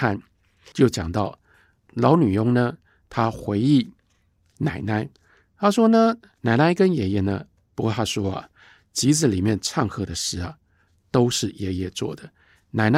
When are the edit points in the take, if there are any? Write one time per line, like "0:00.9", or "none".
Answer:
0:07.7